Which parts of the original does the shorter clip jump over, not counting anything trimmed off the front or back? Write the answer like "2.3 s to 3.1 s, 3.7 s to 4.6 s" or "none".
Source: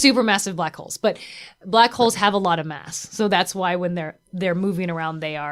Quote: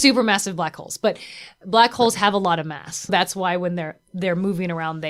3.1 s to 3.3 s